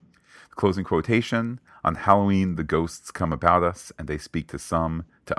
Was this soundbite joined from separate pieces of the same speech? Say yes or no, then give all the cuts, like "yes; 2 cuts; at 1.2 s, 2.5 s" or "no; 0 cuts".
no; 0 cuts